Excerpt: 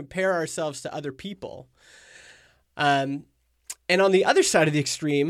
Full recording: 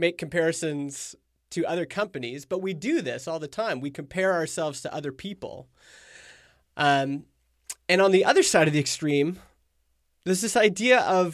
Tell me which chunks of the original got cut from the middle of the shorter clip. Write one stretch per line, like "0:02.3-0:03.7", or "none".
none